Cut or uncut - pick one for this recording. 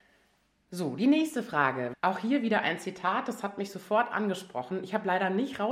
cut